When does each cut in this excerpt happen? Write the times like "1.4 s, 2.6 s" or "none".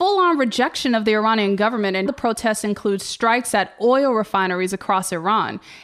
2.1 s